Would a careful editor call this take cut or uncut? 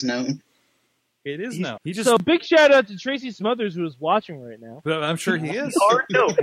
cut